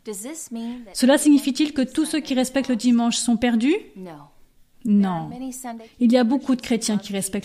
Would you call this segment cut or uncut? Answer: uncut